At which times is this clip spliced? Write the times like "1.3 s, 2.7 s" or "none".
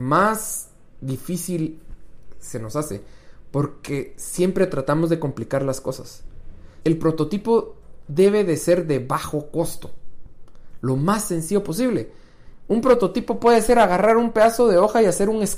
6.8 s